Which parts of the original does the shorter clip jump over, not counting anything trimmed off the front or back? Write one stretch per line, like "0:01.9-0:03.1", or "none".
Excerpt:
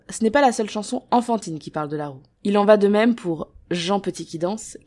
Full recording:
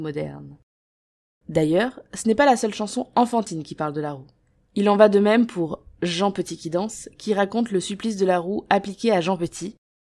0:04.4-0:04.6